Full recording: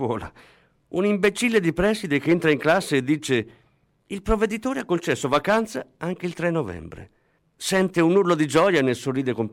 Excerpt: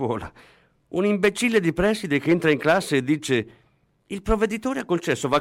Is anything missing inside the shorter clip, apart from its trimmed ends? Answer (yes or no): no